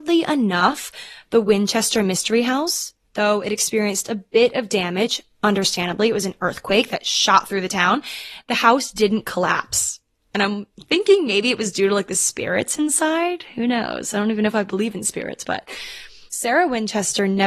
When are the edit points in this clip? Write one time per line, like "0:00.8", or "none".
none